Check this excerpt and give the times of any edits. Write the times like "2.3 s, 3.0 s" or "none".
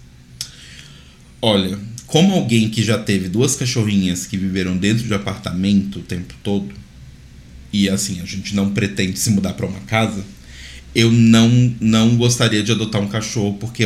none